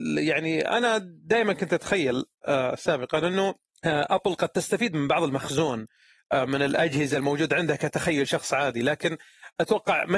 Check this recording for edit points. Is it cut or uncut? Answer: uncut